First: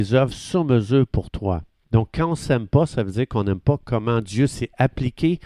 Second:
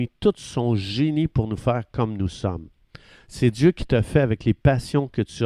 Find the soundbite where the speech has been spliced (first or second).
first